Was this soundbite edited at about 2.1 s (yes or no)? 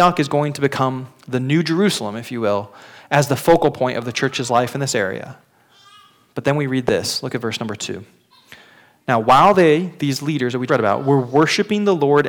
no